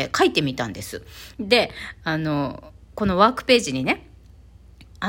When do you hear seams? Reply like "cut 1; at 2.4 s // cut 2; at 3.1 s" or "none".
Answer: cut 1; at 1.3 s